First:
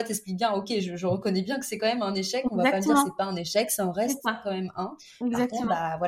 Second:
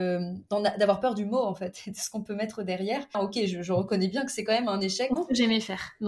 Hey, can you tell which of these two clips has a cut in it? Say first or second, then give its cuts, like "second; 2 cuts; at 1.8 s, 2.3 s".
second; 2 cuts; at 3.1 s, 5.2 s